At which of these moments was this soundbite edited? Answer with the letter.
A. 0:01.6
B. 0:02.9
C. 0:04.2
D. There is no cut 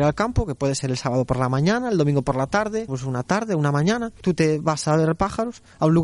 B